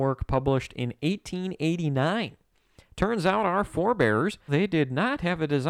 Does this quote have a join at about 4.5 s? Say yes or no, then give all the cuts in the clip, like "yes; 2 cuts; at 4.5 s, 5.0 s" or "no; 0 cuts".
yes; 1 cut; at 4.5 s